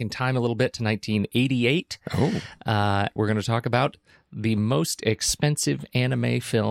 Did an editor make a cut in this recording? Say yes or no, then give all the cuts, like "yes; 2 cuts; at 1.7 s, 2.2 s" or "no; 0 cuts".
yes; 1 cut; at 3.2 s